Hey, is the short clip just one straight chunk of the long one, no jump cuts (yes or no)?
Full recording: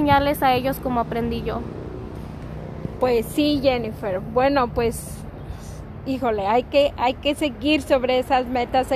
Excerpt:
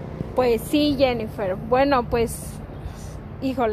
yes